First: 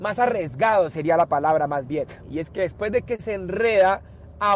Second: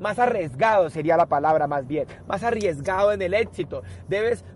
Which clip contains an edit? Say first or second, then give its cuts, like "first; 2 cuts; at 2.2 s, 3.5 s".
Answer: first; 1 cut; at 2.2 s